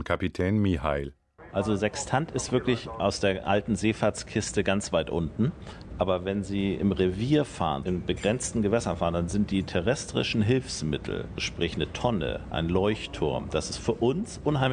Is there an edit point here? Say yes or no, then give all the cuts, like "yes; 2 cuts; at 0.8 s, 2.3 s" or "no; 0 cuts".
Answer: no; 0 cuts